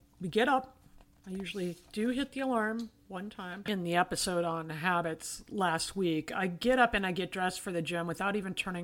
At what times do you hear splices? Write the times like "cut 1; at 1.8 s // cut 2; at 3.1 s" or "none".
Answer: cut 1; at 3.7 s